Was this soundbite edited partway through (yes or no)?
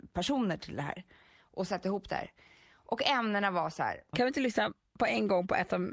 yes